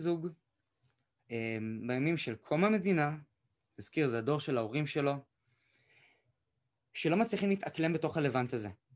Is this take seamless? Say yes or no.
yes